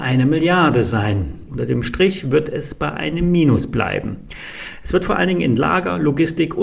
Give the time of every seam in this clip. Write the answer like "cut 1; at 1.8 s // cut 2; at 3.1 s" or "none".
cut 1; at 1.5 s